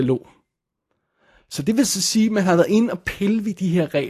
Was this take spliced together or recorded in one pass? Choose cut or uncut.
uncut